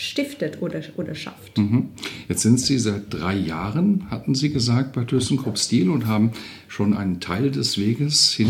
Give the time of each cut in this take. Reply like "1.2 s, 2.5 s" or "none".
none